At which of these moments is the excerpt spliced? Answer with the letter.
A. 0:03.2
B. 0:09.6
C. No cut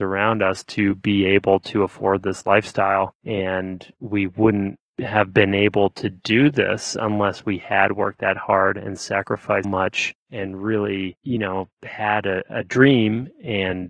B